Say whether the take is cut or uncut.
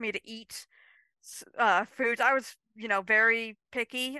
uncut